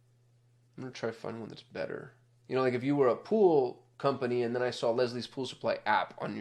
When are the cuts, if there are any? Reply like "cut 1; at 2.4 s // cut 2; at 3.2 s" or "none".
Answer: cut 1; at 2.4 s